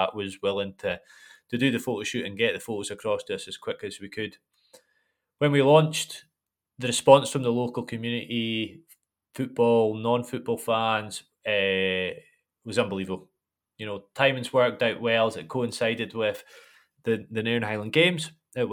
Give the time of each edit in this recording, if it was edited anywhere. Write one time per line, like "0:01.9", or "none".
none